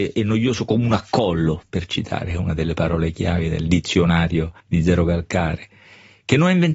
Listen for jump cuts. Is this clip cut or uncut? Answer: cut